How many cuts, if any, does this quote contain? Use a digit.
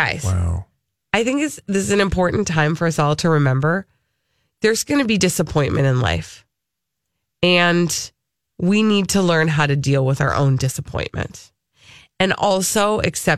0